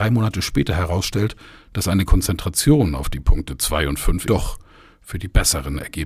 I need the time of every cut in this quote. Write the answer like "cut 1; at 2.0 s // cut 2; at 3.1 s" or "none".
cut 1; at 4.3 s